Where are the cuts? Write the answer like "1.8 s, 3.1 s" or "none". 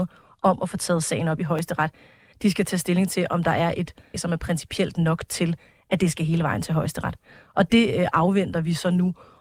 2.3 s, 4.1 s